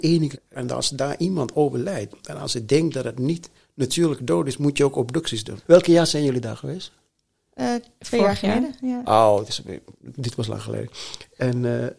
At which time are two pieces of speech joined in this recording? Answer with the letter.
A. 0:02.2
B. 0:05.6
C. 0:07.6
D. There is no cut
B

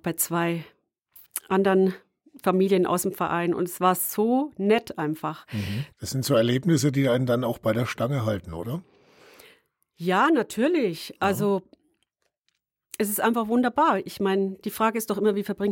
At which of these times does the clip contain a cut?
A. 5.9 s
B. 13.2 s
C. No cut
A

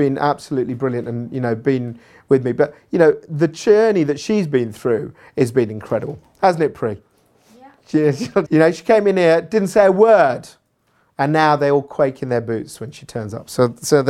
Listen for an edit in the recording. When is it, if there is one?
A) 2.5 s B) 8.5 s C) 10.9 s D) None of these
B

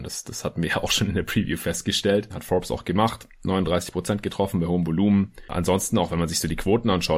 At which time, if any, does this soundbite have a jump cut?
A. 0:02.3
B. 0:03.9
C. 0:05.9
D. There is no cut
A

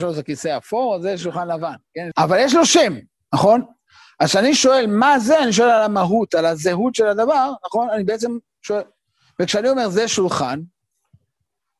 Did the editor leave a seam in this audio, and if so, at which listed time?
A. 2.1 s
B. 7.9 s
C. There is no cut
A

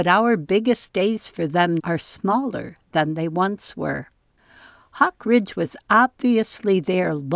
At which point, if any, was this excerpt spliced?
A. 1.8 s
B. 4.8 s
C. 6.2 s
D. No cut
A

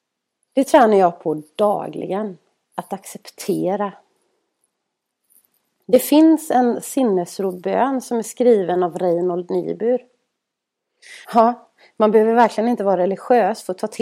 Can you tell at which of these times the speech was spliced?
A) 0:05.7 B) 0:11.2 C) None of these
B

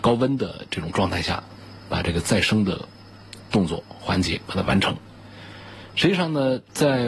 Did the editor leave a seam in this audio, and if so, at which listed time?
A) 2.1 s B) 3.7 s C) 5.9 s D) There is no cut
D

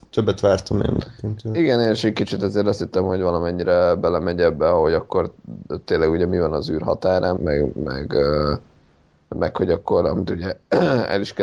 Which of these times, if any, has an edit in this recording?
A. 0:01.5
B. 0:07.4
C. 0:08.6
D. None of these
B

